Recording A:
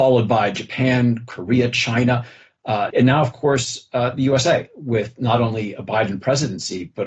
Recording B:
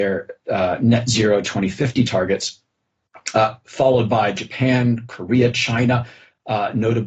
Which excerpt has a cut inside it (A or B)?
A